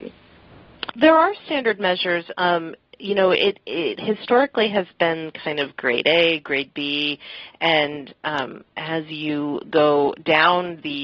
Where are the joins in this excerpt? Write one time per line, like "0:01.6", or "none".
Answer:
0:00.9